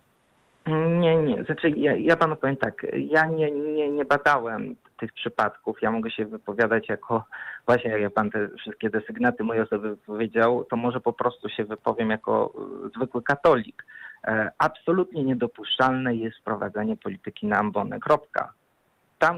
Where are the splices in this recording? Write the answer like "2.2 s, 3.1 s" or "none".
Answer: none